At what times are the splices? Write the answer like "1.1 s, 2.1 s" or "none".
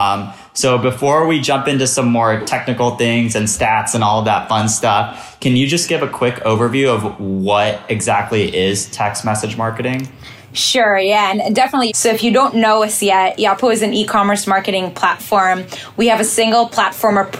11.9 s, 15.9 s